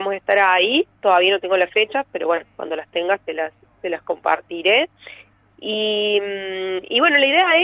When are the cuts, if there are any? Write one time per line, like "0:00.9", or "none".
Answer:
none